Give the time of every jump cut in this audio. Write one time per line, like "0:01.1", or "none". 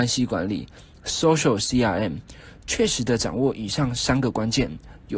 0:02.6